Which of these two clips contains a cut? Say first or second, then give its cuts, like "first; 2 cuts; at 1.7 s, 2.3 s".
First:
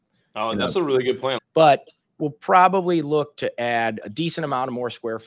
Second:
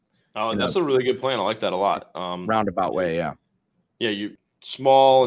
first; 2 cuts; at 1.4 s, 4.0 s